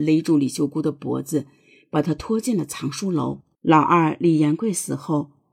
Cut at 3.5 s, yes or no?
yes